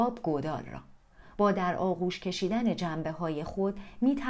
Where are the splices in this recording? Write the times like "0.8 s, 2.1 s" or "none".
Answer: 1.4 s